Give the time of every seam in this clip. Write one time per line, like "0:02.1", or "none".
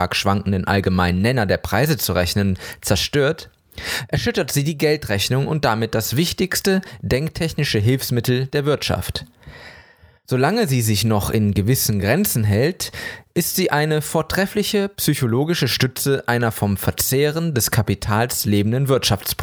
none